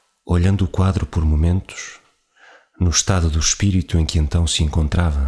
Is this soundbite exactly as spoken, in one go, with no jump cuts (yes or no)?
yes